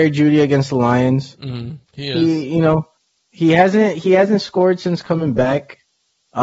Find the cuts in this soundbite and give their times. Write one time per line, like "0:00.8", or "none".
0:01.8